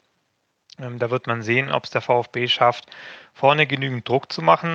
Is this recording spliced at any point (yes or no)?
no